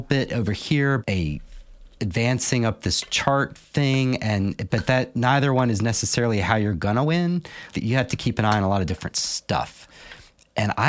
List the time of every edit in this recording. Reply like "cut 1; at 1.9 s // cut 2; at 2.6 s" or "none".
cut 1; at 1.0 s // cut 2; at 7.7 s